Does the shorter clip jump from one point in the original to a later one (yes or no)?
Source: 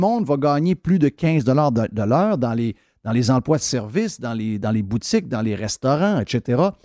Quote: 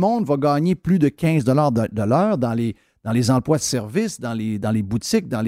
no